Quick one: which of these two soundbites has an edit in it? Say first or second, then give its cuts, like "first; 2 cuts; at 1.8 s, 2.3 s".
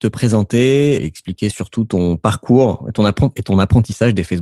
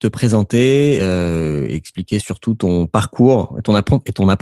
first; 1 cut; at 1.0 s